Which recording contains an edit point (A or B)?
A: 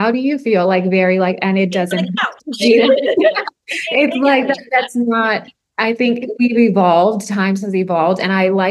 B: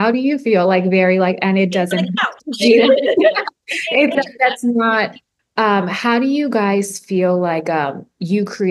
B